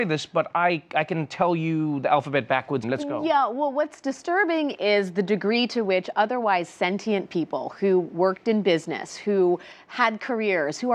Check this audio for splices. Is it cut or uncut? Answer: cut